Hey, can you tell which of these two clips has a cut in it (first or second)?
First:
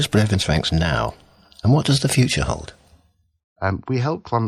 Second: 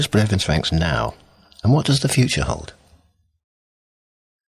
first